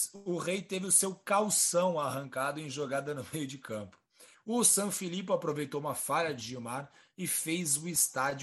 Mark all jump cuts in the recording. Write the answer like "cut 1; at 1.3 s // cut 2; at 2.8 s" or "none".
cut 1; at 4.3 s